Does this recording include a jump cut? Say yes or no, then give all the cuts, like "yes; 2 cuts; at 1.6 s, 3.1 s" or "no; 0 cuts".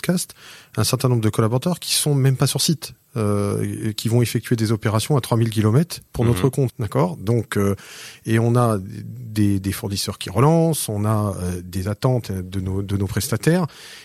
yes; 1 cut; at 6.7 s